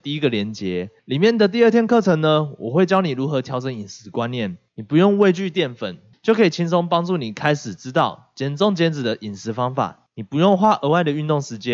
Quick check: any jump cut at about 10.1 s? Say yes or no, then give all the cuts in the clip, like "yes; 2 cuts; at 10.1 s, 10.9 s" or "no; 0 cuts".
no; 0 cuts